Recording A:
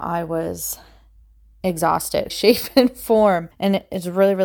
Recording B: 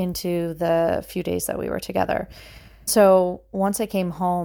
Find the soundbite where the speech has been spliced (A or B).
A